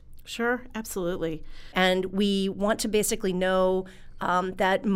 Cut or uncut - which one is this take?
cut